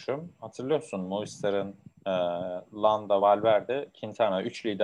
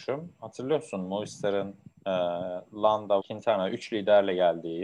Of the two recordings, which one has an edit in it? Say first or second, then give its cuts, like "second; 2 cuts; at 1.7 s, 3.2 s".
second; 1 cut; at 3.2 s